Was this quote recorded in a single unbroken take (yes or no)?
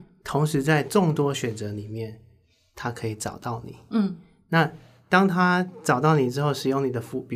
yes